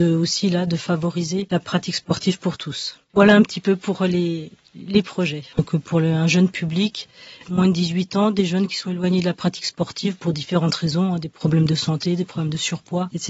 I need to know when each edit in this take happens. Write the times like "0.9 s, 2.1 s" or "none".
5.5 s